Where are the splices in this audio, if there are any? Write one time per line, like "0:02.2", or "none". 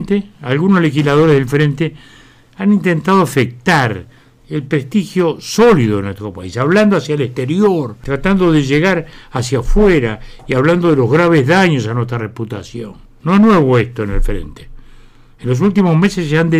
none